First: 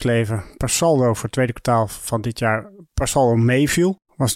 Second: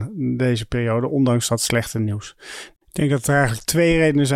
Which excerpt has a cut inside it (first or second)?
second